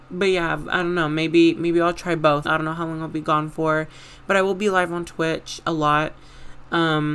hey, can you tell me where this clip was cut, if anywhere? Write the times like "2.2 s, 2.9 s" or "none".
2.4 s